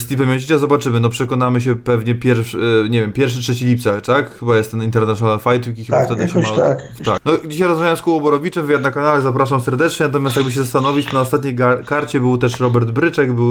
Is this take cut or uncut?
cut